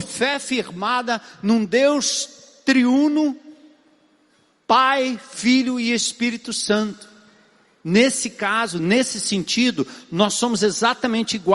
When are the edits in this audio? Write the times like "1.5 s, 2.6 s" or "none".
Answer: none